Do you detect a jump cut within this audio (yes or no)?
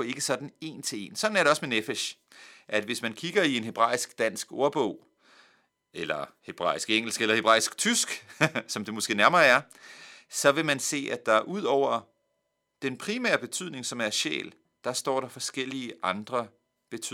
no